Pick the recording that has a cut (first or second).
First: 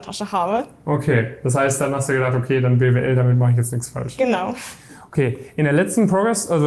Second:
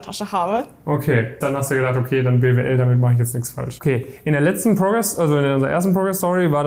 second